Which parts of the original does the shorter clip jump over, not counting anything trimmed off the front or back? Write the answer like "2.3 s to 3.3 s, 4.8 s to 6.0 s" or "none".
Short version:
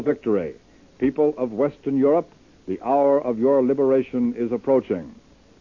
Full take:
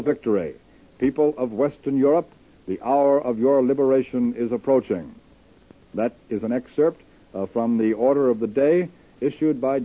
none